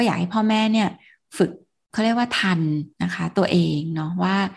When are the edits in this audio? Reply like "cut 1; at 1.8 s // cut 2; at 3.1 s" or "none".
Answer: cut 1; at 2.9 s